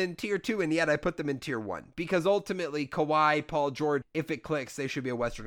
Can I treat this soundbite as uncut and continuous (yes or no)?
no